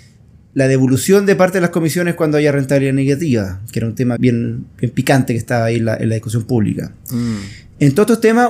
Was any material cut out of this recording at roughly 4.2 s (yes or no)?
yes